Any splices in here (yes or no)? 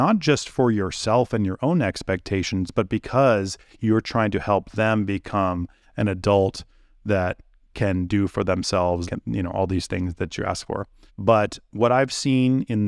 yes